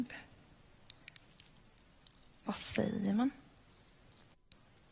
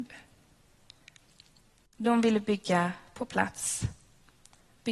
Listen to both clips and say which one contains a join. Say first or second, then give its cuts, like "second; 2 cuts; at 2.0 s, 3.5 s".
second; 1 cut; at 1.9 s